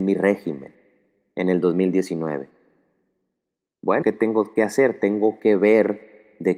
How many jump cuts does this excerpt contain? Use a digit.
1